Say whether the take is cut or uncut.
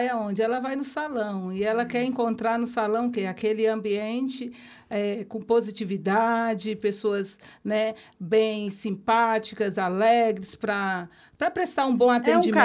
uncut